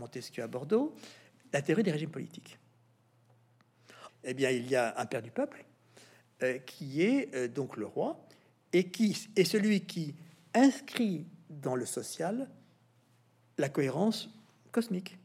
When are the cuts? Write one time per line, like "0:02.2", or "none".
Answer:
0:04.1